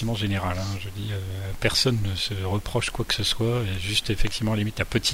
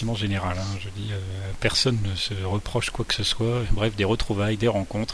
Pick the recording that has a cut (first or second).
second